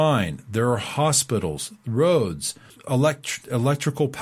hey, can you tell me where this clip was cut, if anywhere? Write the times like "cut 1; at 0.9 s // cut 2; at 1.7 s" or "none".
cut 1; at 2.7 s